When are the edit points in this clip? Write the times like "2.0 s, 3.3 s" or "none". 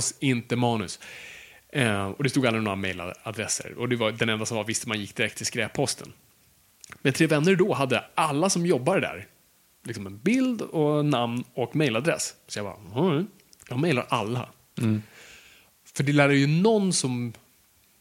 none

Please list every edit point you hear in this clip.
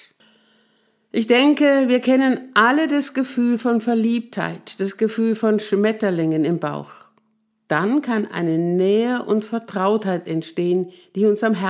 7.7 s

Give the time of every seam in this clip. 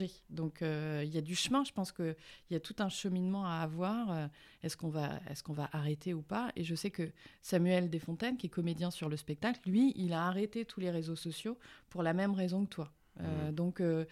none

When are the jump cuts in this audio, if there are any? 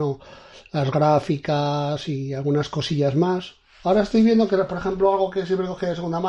none

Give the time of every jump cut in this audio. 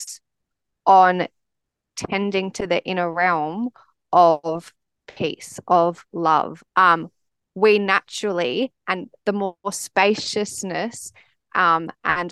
6.7 s, 9.2 s

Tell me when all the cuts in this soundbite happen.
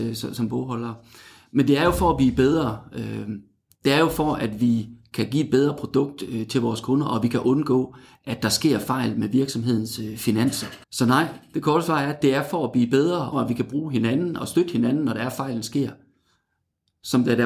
10.8 s, 13.3 s

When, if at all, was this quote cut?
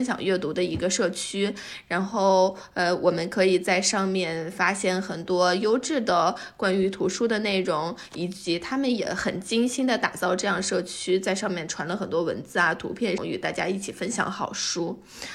13.2 s

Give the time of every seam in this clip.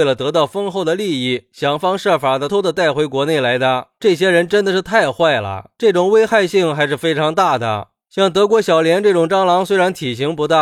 2.5 s

